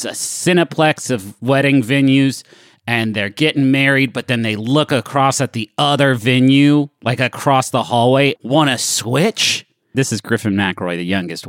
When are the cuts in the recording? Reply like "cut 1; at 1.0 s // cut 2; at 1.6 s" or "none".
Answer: cut 1; at 8.4 s // cut 2; at 9.9 s